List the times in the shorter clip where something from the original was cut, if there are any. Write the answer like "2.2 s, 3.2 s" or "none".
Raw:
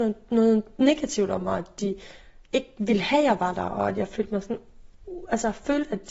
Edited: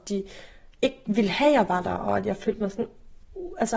none